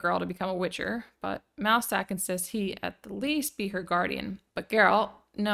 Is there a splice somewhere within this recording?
yes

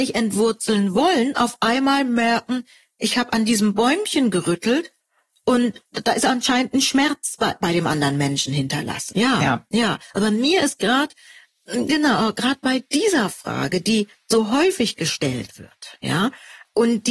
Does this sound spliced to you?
yes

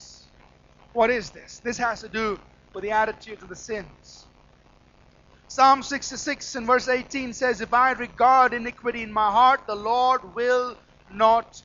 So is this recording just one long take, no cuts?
yes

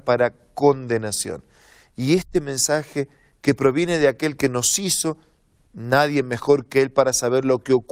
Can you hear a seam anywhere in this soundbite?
no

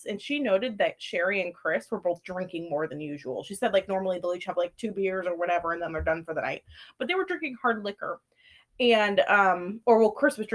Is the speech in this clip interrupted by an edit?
no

